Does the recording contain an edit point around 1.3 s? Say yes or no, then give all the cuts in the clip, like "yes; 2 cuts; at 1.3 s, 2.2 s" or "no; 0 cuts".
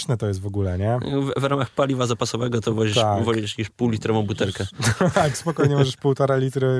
no; 0 cuts